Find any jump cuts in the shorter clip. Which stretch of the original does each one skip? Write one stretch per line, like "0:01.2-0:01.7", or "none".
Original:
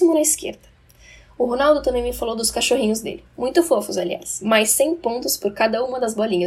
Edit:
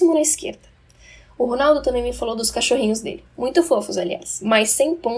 none